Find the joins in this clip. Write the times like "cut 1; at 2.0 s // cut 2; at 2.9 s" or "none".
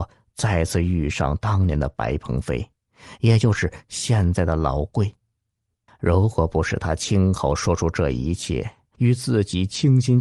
cut 1; at 5.9 s // cut 2; at 8.9 s